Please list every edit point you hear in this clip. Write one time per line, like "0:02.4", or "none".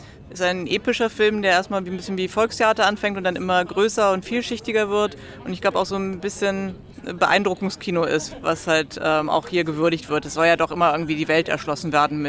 0:06.9